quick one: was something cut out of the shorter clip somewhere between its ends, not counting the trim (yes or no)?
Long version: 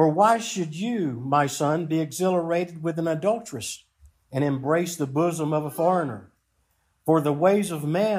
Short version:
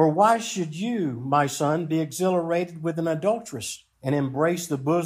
yes